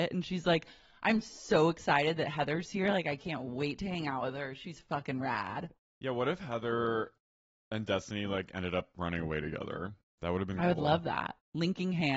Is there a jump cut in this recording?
no; 0 cuts

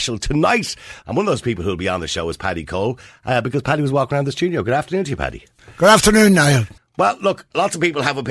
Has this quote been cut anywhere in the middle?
yes; 2 cuts; at 1.0 s, 6.8 s

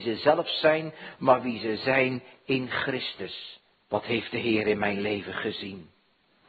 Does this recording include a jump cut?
yes; 1 cut; at 3.7 s

